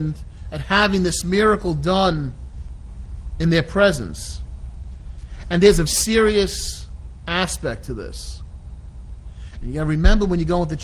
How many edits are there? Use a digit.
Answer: 2